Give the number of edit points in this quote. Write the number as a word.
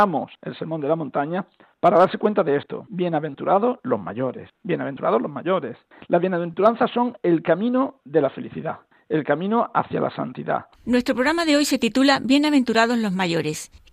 one